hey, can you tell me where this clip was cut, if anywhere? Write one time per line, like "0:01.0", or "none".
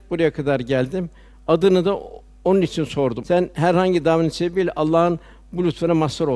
0:03.2